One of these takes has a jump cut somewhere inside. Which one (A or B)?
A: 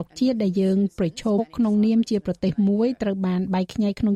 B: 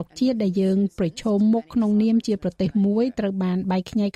A